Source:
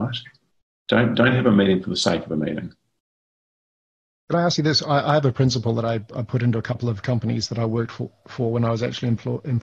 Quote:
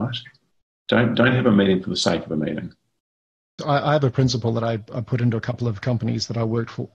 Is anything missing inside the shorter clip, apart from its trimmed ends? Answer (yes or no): yes